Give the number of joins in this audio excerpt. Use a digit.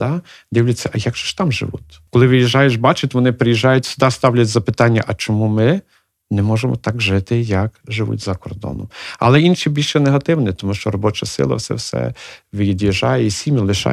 1